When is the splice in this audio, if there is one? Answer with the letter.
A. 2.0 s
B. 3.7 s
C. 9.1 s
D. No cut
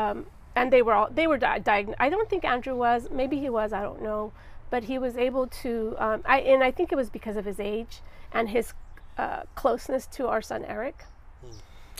D